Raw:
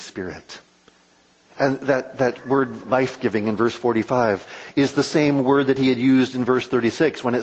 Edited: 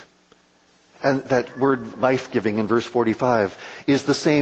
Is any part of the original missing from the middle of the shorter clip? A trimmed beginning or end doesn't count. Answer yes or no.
yes